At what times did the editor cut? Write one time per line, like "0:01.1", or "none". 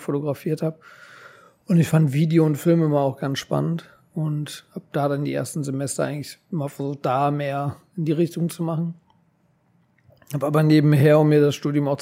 none

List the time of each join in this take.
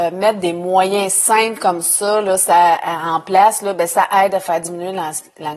none

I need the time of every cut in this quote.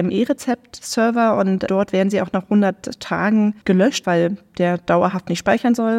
0:04.0

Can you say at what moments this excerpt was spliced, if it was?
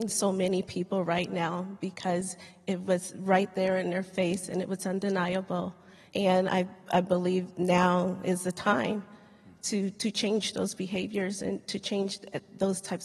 0:06.1

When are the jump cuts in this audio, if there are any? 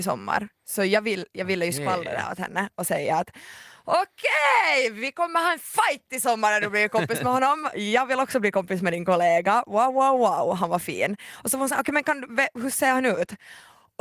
none

